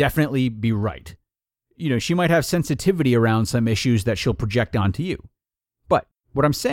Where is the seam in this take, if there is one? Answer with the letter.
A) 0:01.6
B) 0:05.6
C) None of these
C